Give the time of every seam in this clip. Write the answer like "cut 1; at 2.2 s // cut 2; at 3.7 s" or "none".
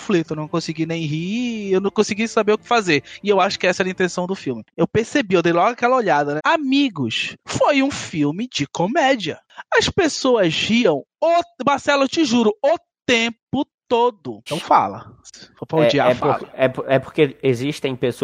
cut 1; at 4.7 s // cut 2; at 6.4 s // cut 3; at 14.5 s